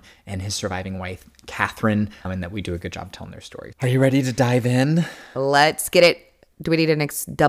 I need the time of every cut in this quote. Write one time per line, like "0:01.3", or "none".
none